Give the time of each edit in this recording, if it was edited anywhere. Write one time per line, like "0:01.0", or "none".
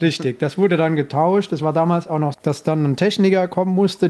0:02.3